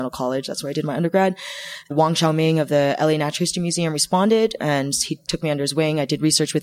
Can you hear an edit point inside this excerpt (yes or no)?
yes